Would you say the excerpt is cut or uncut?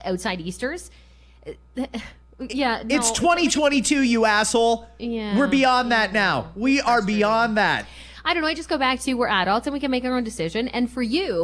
uncut